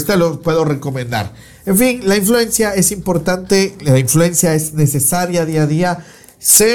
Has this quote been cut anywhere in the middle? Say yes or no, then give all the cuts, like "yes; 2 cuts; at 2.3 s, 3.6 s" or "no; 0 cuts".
no; 0 cuts